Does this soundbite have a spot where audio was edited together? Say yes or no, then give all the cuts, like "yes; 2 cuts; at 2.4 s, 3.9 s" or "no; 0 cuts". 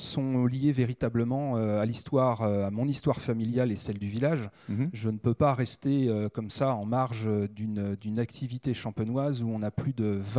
no; 0 cuts